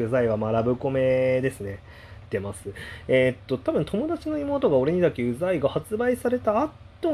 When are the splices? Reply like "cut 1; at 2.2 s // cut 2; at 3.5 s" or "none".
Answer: cut 1; at 2.3 s